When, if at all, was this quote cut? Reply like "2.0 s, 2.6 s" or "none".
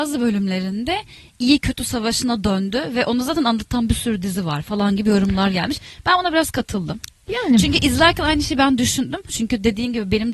9.3 s